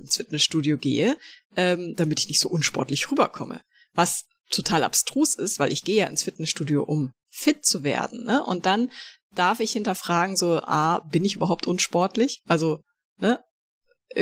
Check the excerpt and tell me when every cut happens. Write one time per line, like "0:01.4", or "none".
none